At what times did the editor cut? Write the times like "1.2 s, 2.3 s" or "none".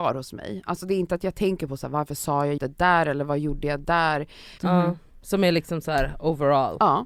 2.6 s, 4.6 s